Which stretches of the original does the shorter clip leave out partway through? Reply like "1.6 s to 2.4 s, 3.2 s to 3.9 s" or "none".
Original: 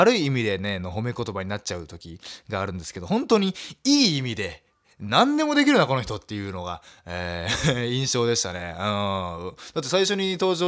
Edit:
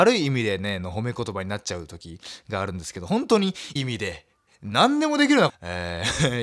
3.8 s to 4.1 s, 5.9 s to 6.9 s